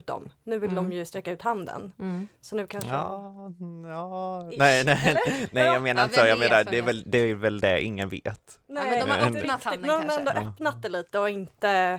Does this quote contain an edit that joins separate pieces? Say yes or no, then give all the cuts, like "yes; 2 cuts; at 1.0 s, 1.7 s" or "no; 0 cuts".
no; 0 cuts